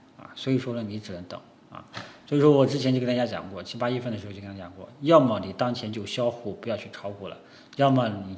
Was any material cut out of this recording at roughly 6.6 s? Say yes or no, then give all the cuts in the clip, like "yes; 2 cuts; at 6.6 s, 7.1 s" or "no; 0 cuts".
no; 0 cuts